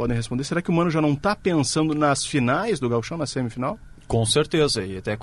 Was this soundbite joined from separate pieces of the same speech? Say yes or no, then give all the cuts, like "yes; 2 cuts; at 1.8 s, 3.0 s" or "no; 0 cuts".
no; 0 cuts